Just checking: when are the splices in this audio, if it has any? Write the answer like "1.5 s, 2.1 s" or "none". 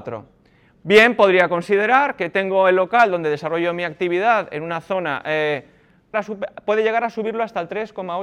6.1 s